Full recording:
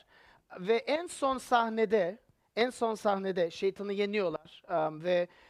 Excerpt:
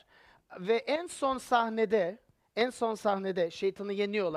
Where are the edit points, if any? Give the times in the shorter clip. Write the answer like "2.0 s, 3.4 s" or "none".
none